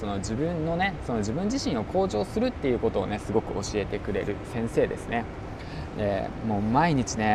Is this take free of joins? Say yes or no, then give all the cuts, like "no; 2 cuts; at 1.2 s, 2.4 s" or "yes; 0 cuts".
yes; 0 cuts